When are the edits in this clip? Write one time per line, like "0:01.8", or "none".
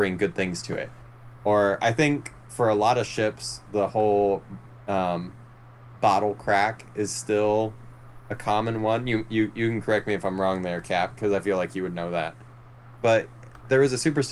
0:13.0